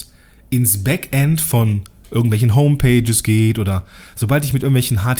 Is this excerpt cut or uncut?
uncut